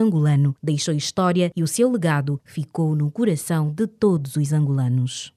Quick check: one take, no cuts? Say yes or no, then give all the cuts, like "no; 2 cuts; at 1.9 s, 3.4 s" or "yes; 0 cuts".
yes; 0 cuts